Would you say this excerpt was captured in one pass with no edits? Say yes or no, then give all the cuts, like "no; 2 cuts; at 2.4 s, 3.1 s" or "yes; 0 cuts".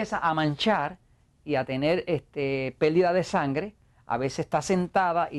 yes; 0 cuts